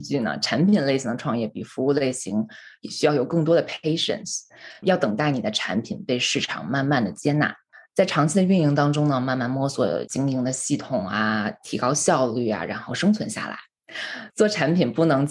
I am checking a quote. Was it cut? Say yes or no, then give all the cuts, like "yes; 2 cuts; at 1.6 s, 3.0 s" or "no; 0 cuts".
no; 0 cuts